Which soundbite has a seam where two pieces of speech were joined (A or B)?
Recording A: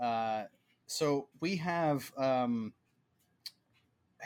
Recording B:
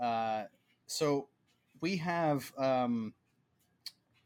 A